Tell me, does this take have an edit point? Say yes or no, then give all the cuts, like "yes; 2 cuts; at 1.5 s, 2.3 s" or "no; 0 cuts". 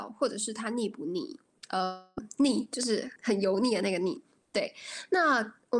yes; 1 cut; at 3.2 s